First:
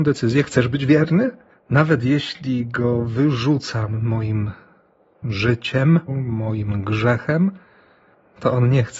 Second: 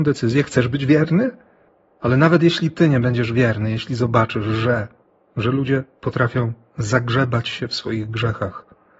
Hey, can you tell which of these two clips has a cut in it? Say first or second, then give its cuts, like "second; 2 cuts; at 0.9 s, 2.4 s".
first; 2 cuts; at 1.5 s, 6.1 s